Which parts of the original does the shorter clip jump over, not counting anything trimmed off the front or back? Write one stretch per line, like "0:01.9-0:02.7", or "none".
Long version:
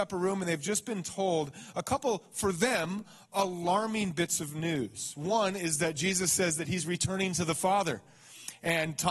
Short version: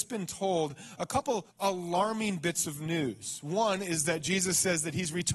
0:02.2-0:03.2